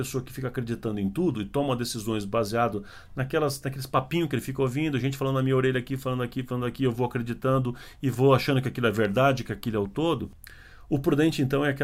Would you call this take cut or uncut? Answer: uncut